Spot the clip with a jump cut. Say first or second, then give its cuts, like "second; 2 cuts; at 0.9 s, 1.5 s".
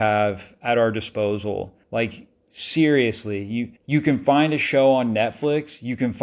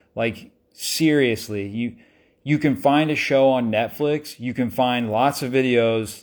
first; 2 cuts; at 1.8 s, 3.8 s